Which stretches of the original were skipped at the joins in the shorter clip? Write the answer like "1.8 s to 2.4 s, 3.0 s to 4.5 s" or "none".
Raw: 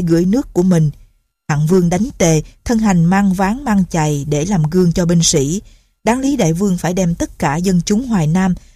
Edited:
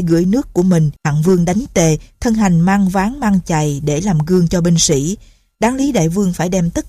1.0 s to 1.4 s